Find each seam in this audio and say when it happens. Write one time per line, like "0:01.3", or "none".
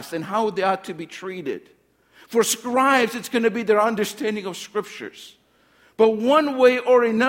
none